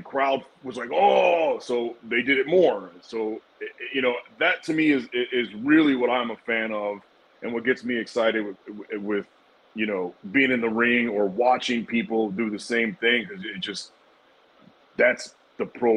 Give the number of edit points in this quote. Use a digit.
0